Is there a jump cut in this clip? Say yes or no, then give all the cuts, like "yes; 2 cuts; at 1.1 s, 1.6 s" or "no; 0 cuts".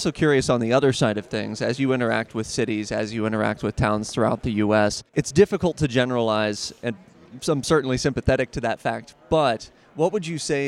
yes; 1 cut; at 5.1 s